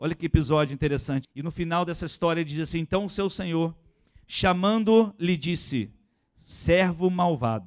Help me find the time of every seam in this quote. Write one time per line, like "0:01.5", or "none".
0:01.2